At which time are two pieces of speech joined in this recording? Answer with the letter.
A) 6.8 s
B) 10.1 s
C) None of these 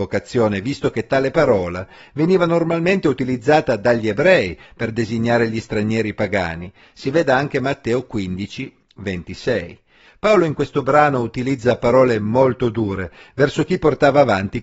B